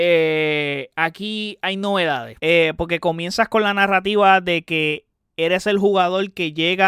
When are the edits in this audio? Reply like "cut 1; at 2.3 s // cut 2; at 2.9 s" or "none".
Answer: cut 1; at 2.4 s